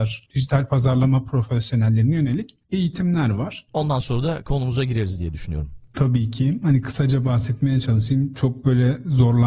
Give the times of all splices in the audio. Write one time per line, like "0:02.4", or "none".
0:03.7